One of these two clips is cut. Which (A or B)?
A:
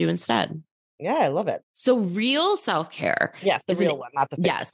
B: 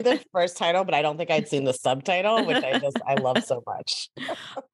A